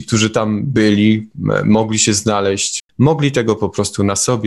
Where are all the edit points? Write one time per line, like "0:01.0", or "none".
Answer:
0:02.8